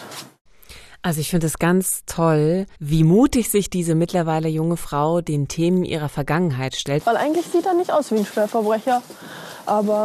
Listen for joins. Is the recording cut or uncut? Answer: cut